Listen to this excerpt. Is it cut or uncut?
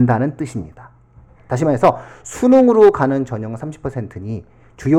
cut